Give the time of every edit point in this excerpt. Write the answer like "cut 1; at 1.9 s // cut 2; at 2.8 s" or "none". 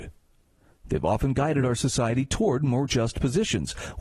none